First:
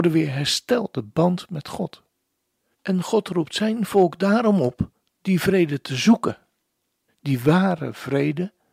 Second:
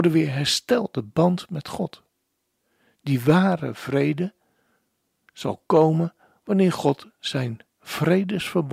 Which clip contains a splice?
first; 2 cuts; at 2.7 s, 7.1 s

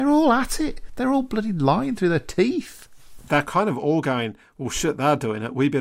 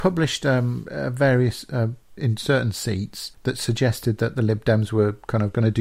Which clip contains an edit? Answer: second; 2 cuts; at 2.2 s, 3.3 s

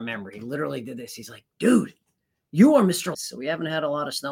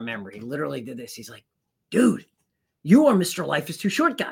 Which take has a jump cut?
first; 2 cuts; at 1.5 s, 3.1 s

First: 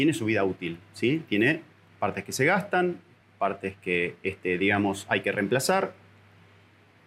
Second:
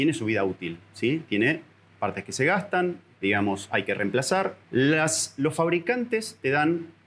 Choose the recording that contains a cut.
second; 2 cuts; at 3.2 s, 4.6 s

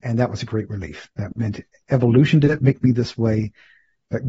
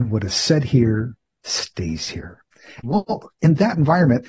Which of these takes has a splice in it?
second; 1 cut; at 2.8 s

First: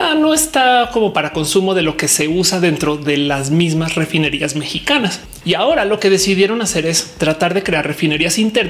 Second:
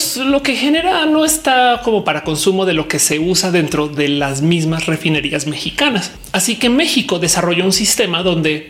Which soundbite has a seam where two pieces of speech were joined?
first; 1 cut; at 5.4 s

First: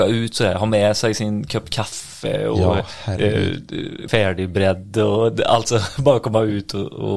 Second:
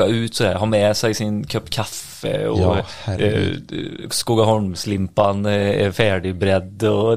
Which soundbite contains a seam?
first; 1 cut; at 4.1 s

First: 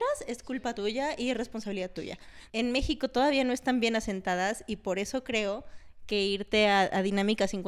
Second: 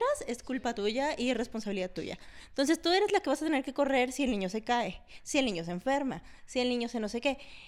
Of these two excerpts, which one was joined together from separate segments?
first; 1 cut; at 2.5 s

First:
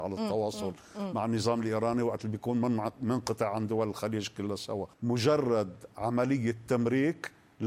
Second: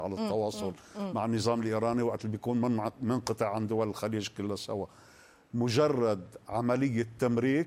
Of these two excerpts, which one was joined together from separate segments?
first; 1 cut; at 4.9 s

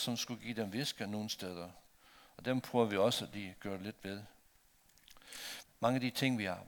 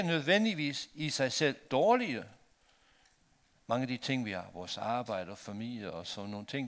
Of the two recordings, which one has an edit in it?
first; 1 cut; at 5.6 s

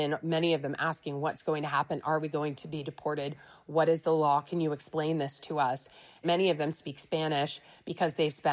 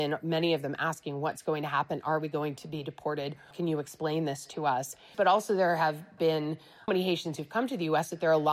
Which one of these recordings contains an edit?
second; 3 cuts; at 3.5 s, 5.1 s, 6.9 s

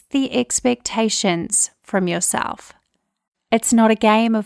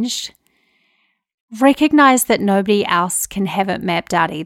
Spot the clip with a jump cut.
first; 1 cut; at 3.3 s

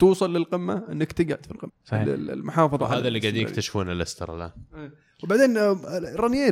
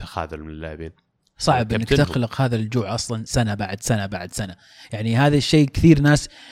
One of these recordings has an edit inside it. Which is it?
first; 1 cut; at 1.7 s

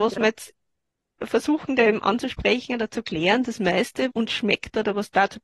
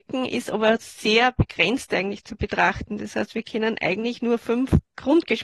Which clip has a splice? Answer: first; 1 cut; at 4.1 s

